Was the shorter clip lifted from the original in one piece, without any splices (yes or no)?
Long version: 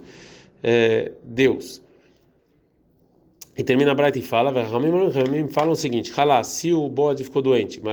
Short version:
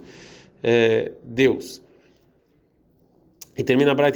yes